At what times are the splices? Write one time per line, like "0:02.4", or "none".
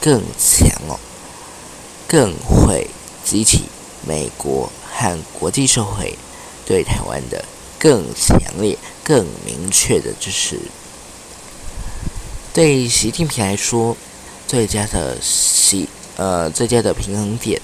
none